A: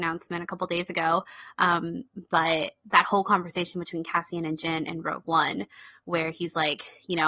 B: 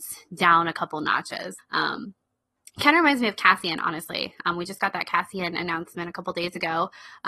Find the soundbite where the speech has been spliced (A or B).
B